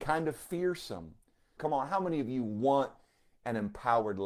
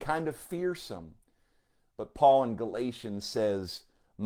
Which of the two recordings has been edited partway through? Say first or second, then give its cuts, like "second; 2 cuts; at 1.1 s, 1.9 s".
first; 1 cut; at 1.6 s